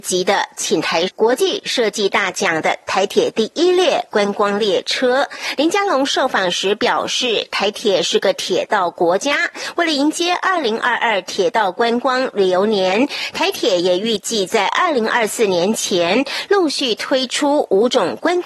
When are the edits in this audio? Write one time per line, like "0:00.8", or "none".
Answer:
0:01.1